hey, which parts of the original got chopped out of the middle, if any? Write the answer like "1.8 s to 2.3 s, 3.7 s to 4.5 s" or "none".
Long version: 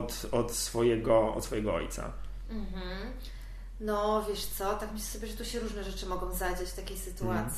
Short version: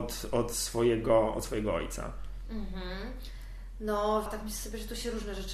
4.3 s to 4.7 s